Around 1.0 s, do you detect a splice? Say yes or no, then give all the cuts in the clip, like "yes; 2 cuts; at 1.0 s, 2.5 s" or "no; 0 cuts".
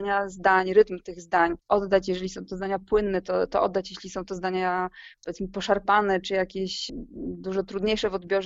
no; 0 cuts